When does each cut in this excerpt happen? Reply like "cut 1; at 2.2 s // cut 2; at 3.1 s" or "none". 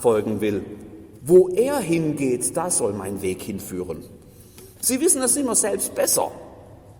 cut 1; at 1.2 s // cut 2; at 4.8 s